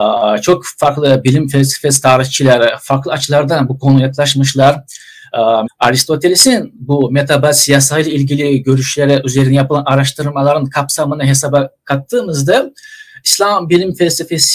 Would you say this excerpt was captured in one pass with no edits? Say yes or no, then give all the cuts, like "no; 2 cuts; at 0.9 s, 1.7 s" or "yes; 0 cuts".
no; 1 cut; at 5.7 s